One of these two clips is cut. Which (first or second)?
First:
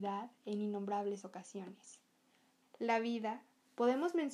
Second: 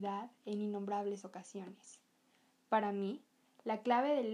first